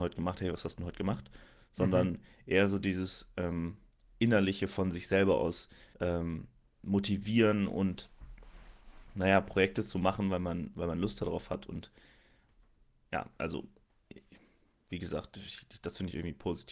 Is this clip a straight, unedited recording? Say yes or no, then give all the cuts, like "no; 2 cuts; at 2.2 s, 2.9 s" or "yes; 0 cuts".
no; 1 cut; at 5.9 s